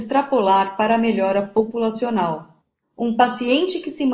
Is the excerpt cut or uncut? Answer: cut